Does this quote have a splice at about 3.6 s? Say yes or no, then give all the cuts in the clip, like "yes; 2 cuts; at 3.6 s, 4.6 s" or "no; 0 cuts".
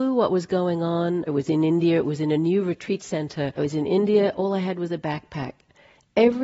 yes; 2 cuts; at 1.3 s, 3.6 s